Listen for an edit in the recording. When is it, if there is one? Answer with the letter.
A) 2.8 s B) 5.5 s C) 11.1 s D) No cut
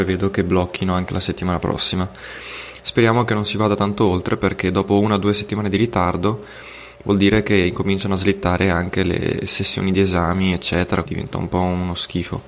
C